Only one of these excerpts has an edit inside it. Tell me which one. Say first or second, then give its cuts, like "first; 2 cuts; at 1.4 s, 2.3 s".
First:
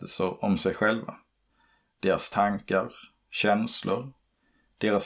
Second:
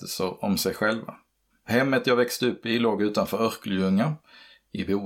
second; 1 cut; at 1.5 s